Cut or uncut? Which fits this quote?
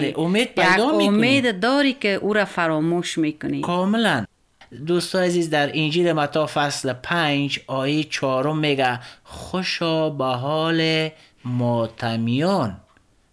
uncut